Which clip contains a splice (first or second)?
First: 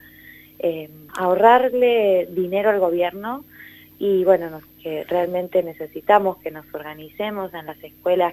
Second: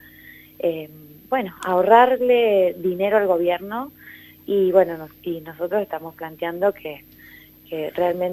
first